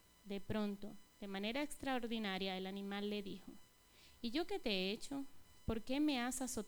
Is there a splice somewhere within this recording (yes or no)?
no